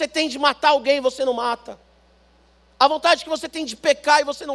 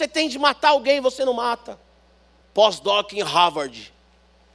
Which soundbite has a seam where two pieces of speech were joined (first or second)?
second